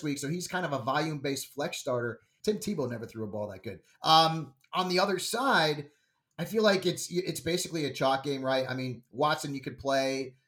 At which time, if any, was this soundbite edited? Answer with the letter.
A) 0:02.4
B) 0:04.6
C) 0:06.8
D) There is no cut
A